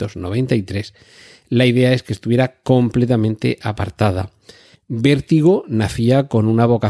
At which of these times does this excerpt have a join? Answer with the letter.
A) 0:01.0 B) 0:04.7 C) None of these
B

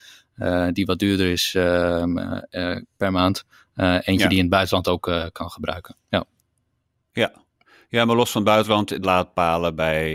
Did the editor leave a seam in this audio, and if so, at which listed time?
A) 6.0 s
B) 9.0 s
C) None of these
B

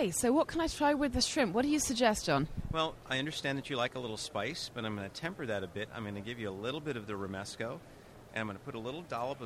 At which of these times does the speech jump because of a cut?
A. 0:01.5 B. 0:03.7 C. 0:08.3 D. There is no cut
C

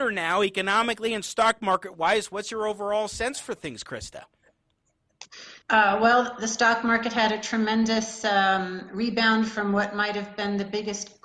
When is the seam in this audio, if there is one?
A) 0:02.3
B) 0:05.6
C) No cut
B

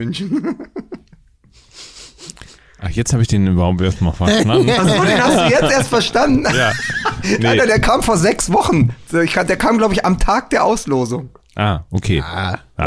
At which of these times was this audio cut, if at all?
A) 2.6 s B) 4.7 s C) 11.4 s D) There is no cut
D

